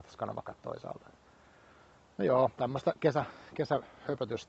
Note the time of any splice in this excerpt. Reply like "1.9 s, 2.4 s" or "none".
none